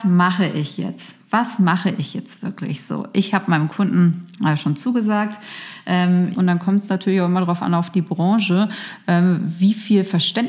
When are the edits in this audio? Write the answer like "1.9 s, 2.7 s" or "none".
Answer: 6.3 s